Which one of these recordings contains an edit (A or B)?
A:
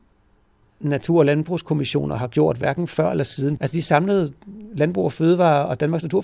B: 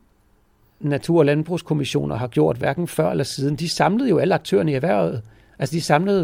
A